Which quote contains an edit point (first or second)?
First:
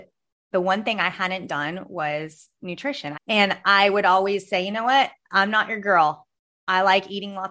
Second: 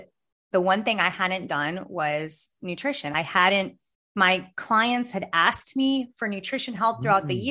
first